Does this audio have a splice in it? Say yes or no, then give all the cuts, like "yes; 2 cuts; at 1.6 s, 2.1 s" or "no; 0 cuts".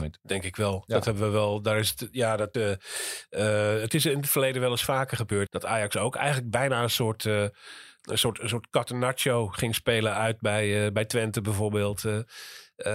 yes; 2 cuts; at 2.5 s, 5.5 s